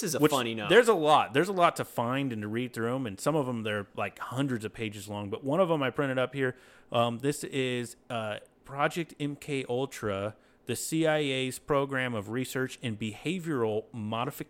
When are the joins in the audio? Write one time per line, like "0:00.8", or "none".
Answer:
none